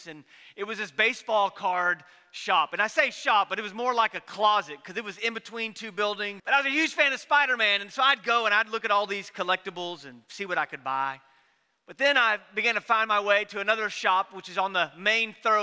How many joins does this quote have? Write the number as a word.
one